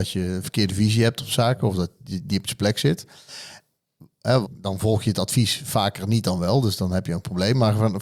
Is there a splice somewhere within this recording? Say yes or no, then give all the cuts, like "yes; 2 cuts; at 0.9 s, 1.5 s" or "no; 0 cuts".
yes; 1 cut; at 4.4 s